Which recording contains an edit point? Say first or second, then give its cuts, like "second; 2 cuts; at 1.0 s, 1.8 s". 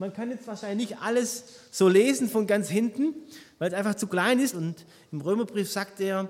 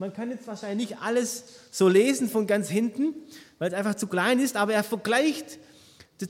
first; 1 cut; at 4.5 s